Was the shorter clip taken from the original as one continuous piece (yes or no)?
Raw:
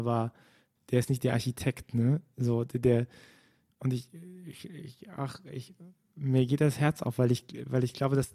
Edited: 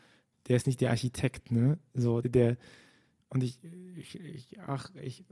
no